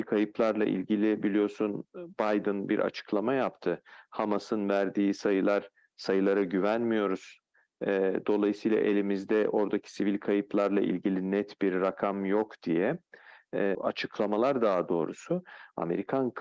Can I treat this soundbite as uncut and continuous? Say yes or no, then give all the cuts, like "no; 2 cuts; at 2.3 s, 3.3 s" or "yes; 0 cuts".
no; 1 cut; at 13.7 s